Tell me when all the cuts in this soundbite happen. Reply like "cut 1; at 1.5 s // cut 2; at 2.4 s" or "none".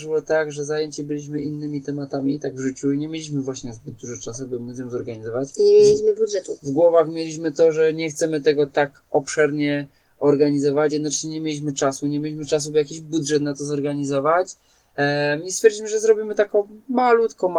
none